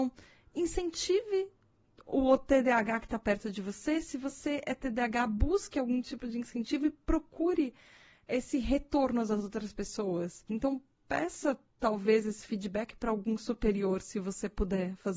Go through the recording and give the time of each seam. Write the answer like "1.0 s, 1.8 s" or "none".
10.5 s

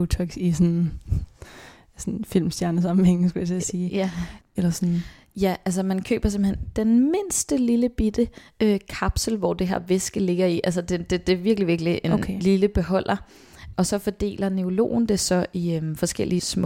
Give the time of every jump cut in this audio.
4.5 s

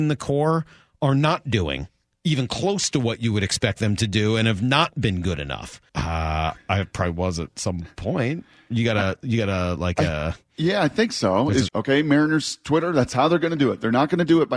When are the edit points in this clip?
5.9 s, 11.7 s

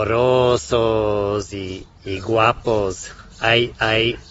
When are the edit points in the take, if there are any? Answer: 1.9 s

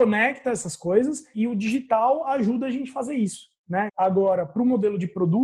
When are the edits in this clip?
1.3 s, 3.9 s

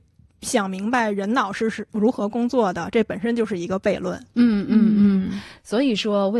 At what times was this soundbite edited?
none

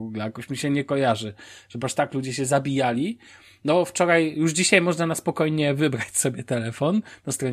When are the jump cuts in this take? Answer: none

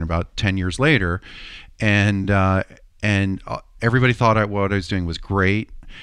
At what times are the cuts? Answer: none

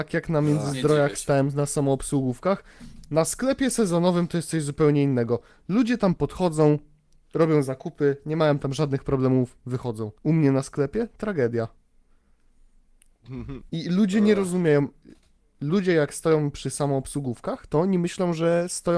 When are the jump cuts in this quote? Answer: 10.2 s, 13.7 s

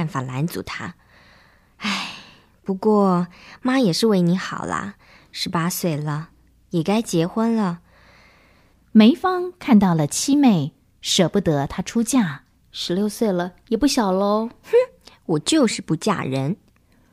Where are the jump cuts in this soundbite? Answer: 8.7 s, 12.6 s

